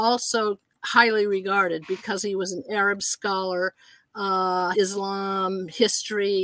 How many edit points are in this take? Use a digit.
1